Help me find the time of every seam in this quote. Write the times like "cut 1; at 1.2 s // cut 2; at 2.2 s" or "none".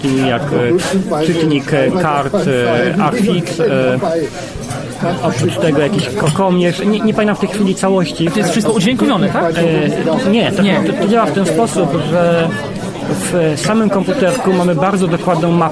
none